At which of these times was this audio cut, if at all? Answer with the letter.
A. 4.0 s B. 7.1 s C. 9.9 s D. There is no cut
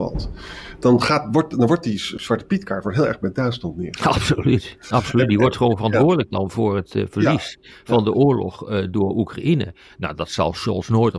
D